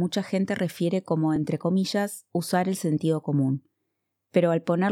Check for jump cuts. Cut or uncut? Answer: uncut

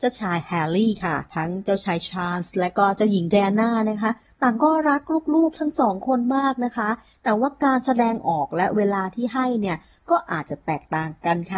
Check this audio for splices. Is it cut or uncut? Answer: cut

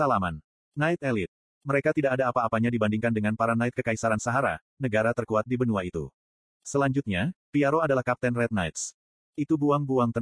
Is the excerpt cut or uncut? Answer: uncut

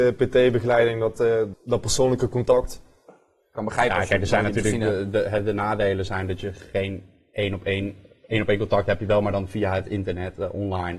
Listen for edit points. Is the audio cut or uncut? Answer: cut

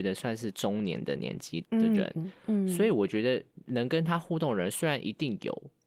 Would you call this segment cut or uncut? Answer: cut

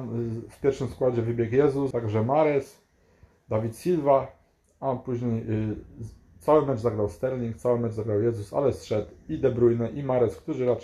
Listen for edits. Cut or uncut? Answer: cut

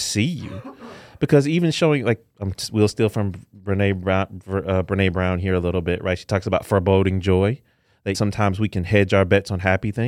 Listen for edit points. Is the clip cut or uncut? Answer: cut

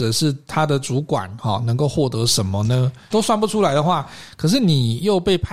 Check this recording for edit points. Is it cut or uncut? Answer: cut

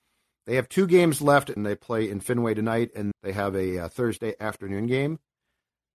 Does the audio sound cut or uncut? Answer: cut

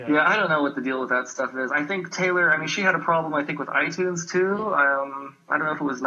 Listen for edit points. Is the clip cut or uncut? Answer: uncut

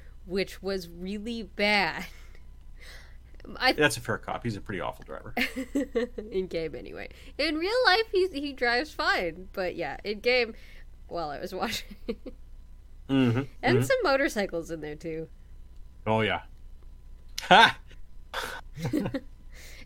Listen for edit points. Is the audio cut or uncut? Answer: cut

